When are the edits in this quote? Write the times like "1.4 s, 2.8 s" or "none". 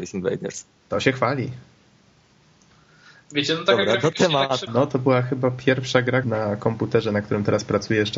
4.7 s, 6.2 s